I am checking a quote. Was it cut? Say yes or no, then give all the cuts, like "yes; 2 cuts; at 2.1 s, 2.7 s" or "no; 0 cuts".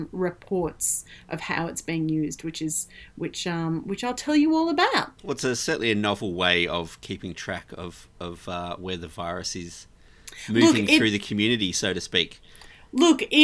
yes; 1 cut; at 5.2 s